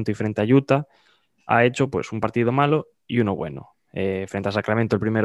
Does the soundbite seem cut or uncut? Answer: uncut